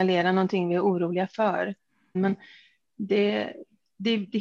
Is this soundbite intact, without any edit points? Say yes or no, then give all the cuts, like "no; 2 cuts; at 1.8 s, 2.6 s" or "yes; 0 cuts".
no; 1 cut; at 2.1 s